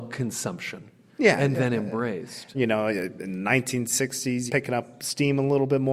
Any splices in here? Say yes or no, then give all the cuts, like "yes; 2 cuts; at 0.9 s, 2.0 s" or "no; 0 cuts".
yes; 3 cuts; at 1.1 s, 2.5 s, 4.5 s